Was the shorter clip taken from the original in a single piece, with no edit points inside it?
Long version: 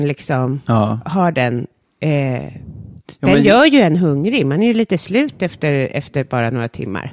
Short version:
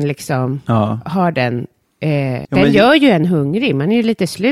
no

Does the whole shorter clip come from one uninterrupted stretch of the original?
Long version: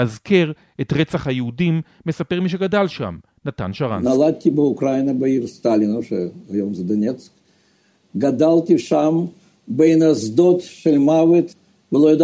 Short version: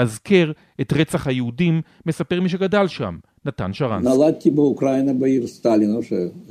yes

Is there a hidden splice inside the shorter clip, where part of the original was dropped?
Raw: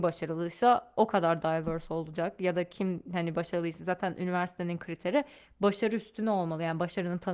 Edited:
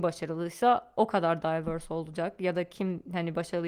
no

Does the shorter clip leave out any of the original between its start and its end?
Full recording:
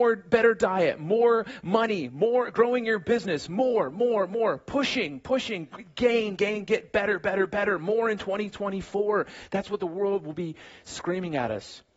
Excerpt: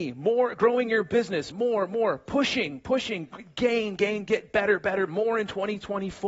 yes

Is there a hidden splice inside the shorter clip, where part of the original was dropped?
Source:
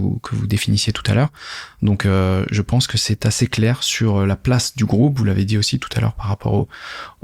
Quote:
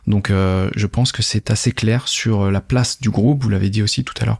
no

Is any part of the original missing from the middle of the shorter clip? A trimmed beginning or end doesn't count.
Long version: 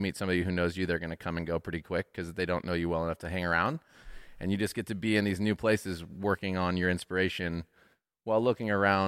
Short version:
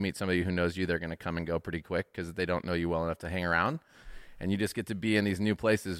no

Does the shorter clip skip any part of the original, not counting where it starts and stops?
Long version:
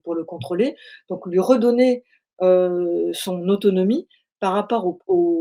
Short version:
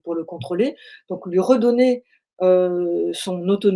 no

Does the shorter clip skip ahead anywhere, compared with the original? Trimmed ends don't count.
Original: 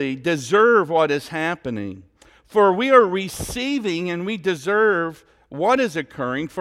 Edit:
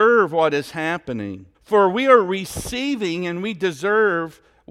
yes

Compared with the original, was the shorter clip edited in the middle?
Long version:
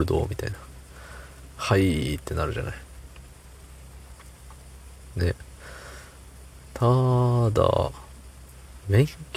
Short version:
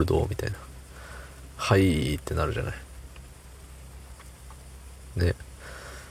no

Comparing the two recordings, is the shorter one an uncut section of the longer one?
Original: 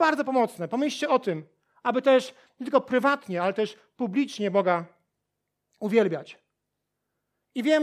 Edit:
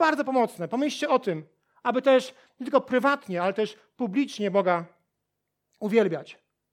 yes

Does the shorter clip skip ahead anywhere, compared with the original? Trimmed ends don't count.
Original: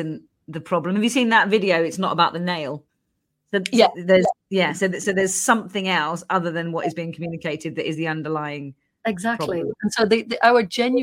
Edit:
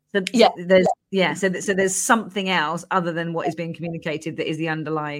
no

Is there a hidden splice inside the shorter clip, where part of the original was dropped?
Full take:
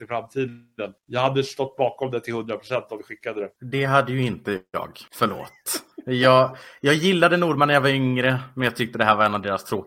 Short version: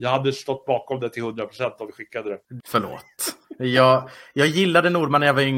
yes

